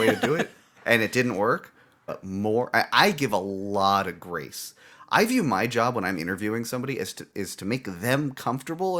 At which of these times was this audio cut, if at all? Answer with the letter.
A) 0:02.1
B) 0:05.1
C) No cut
A